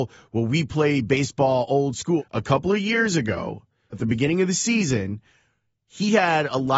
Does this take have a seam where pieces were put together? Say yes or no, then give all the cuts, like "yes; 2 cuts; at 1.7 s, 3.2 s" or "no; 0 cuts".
yes; 2 cuts; at 2.2 s, 3.9 s